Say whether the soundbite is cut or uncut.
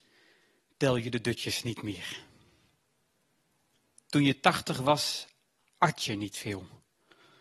uncut